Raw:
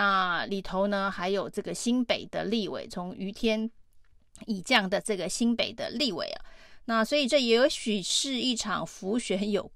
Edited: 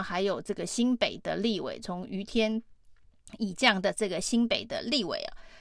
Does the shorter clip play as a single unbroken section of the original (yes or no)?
yes